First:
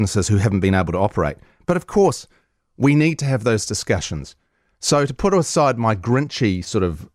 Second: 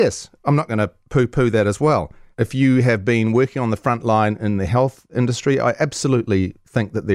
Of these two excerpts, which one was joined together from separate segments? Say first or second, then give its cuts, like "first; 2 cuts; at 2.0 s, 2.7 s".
second; 1 cut; at 2.3 s